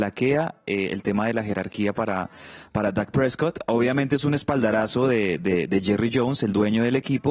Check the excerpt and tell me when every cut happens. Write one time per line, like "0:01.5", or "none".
none